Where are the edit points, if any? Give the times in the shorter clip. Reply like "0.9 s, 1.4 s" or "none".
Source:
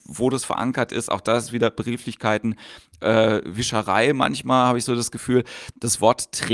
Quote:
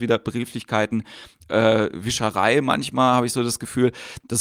none